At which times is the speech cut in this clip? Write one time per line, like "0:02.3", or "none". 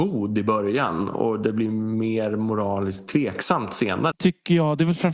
0:04.1